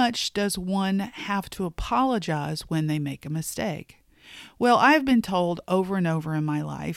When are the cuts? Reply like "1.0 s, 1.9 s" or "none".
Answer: none